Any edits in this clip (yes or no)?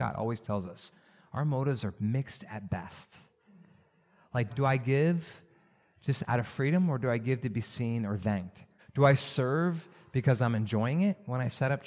yes